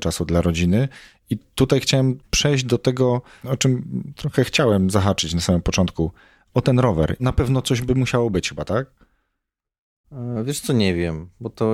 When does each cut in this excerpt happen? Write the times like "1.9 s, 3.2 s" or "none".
7.2 s